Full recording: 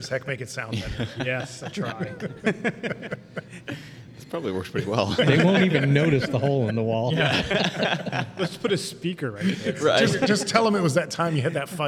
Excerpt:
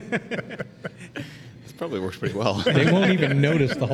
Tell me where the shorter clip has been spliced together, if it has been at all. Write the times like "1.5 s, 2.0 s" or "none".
none